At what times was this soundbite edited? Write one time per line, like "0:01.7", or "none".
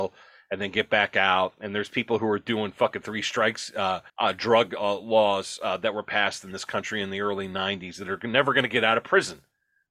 0:04.1